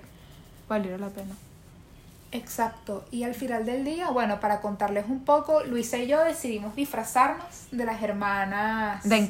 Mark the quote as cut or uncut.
uncut